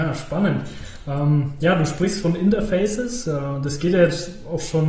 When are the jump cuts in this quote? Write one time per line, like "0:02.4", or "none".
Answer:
none